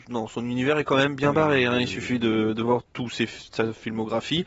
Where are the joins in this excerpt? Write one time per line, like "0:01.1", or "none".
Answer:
0:02.9